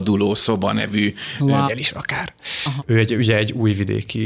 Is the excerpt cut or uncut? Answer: cut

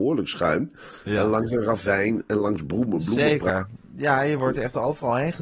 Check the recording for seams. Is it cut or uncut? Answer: uncut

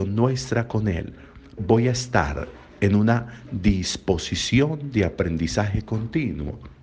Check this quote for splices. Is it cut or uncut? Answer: cut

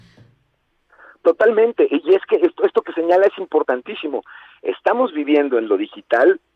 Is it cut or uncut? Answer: uncut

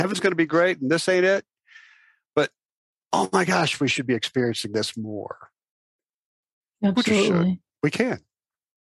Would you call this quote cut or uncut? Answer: uncut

